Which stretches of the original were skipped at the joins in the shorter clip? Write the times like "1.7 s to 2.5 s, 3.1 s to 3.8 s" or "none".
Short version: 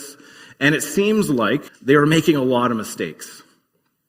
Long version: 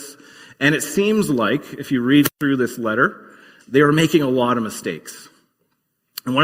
1.7 s to 3.5 s